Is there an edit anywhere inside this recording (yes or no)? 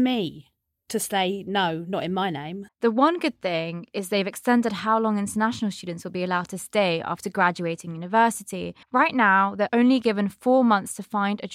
yes